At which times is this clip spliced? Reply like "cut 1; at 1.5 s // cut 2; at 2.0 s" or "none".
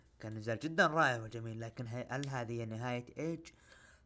cut 1; at 1.9 s